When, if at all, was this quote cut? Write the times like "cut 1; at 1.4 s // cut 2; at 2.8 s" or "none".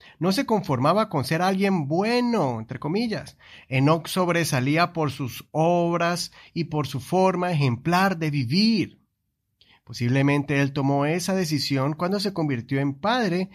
none